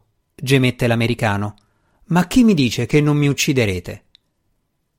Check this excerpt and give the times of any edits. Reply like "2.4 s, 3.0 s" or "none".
none